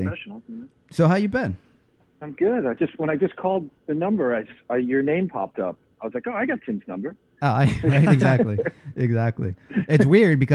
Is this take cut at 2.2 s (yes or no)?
yes